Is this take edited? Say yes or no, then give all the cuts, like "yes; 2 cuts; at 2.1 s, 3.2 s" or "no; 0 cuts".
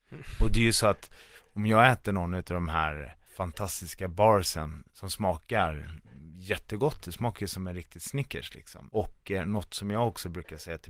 yes; 2 cuts; at 3.3 s, 8.9 s